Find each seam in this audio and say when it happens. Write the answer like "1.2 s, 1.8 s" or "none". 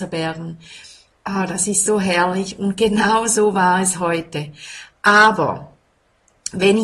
none